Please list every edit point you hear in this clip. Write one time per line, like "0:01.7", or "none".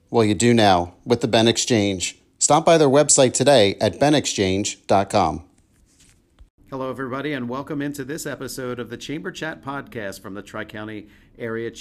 none